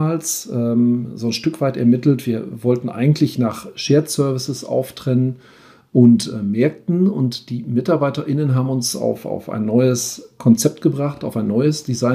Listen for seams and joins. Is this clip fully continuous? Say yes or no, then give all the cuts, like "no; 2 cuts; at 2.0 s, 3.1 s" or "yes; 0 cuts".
yes; 0 cuts